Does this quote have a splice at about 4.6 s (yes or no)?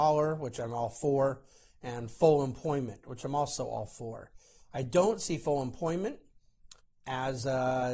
no